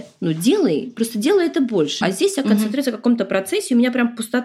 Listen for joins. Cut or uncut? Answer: cut